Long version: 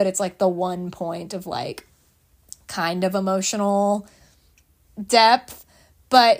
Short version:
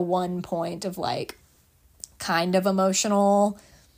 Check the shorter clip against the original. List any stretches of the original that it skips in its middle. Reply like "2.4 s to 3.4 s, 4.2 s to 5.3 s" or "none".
none